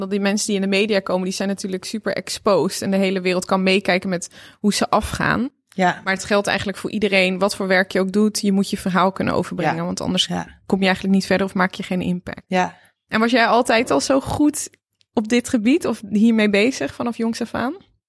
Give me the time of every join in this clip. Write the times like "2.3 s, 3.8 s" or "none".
none